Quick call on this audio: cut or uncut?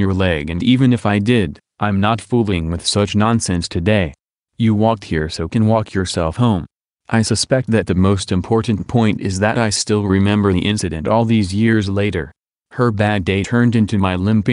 uncut